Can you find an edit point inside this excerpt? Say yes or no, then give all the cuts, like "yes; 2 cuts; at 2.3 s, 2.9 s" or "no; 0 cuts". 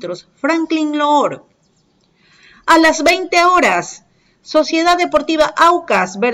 no; 0 cuts